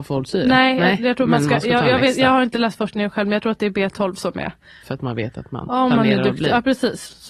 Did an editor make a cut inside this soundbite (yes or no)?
yes